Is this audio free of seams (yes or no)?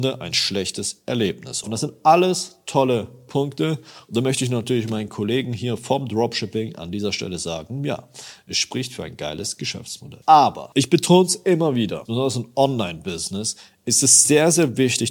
no